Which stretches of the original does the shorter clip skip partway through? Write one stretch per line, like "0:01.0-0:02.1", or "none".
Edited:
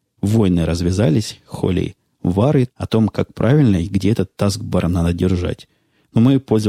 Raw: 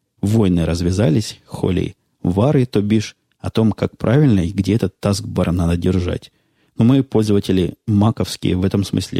0:02.7-0:03.3